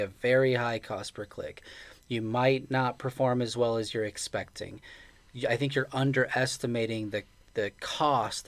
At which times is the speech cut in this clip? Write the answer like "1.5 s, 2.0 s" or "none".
none